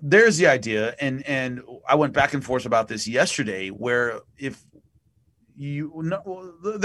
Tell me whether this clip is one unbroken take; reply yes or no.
yes